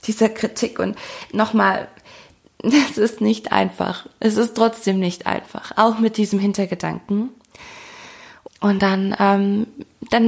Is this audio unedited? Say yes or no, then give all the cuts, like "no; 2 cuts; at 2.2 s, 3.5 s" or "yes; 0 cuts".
no; 1 cut; at 8.5 s